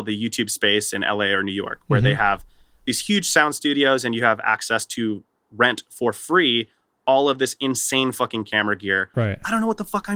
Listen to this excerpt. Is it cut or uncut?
cut